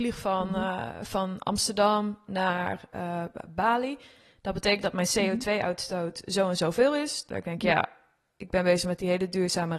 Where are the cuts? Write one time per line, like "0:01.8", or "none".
0:07.3